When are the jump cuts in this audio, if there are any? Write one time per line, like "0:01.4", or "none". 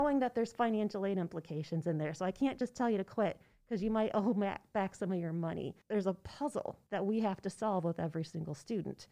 none